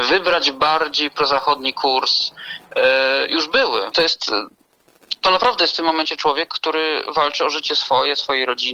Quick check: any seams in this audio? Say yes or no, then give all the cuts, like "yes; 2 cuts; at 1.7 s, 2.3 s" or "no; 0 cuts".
yes; 1 cut; at 3.9 s